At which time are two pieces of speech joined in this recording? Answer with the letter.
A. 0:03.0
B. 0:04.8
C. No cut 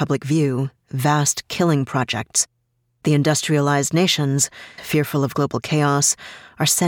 B